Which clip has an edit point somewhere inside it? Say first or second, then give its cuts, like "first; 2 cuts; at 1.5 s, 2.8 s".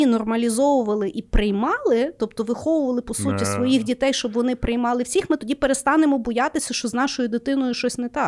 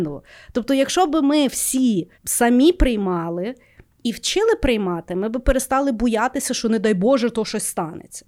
second; 1 cut; at 2.1 s